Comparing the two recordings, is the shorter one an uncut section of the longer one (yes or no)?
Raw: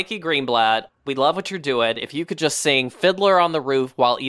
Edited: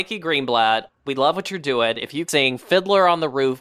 no